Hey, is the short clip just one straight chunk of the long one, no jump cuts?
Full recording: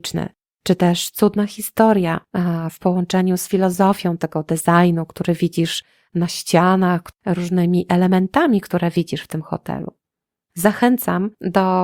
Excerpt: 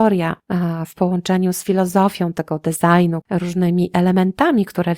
no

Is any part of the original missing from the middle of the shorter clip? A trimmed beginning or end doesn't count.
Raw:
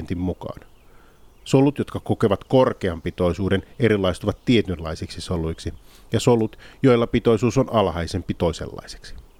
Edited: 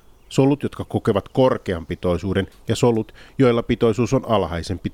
yes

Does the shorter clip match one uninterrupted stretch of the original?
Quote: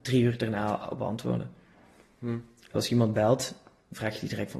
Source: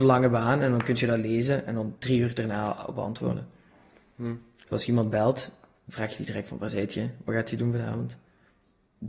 yes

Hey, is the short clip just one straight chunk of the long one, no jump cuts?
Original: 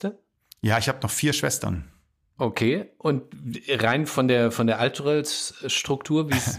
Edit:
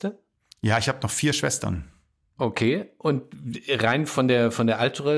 yes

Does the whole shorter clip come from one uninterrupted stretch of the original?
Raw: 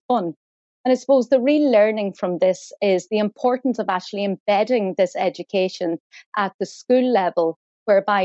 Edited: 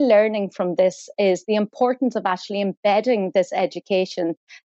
yes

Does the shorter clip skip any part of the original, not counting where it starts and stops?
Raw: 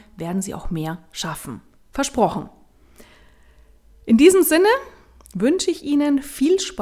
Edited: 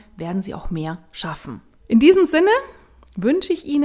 yes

